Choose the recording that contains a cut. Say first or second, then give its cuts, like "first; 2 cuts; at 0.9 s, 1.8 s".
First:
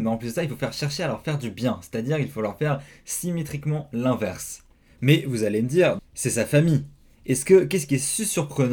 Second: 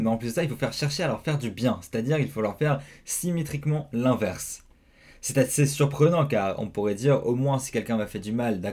first; 2 cuts; at 4.8 s, 6.0 s